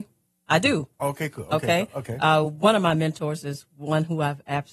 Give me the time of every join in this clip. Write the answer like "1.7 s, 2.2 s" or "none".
none